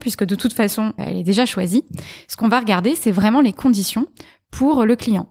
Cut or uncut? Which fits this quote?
cut